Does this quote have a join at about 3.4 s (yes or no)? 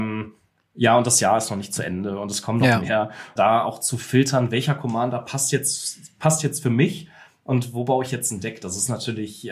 yes